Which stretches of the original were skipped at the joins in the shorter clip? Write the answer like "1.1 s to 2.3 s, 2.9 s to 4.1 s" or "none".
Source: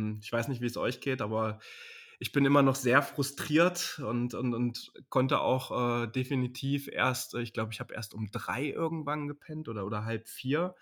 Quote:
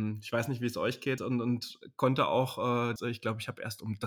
1.2 s to 4.3 s, 6.1 s to 7.3 s